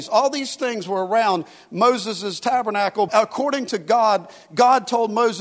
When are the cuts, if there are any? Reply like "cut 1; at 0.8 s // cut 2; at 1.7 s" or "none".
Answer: cut 1; at 3.1 s